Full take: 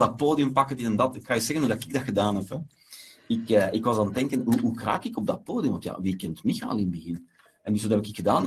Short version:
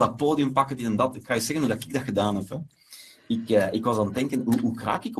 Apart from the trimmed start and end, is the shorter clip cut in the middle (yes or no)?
no